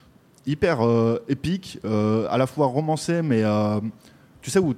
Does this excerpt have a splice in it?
no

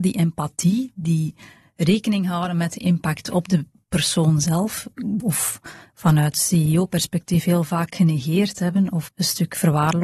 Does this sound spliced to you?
yes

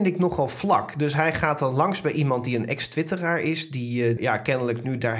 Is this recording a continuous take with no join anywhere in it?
no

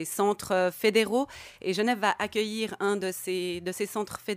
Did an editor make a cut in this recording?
no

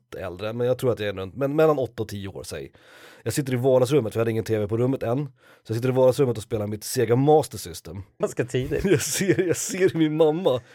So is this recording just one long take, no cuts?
no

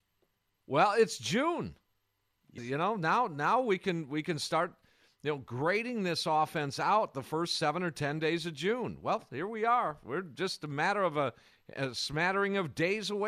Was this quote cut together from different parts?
yes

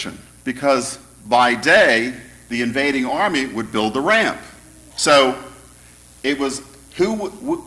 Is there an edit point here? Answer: yes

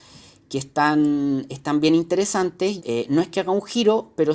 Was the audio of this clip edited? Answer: yes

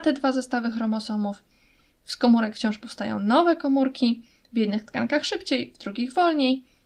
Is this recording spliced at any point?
no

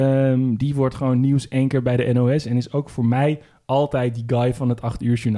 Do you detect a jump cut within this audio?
no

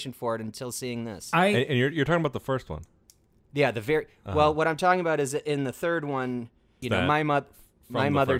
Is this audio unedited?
no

